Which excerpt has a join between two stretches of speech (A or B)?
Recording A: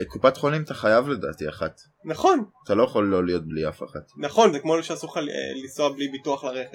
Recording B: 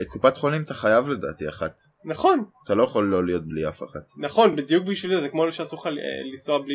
A